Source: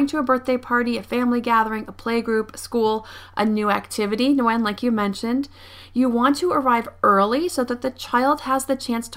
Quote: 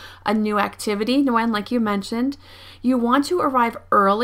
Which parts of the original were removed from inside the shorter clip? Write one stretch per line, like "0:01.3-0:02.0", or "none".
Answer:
none